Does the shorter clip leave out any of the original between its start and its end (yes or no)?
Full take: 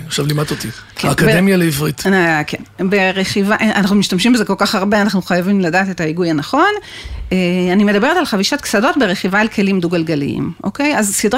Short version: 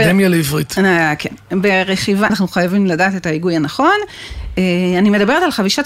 yes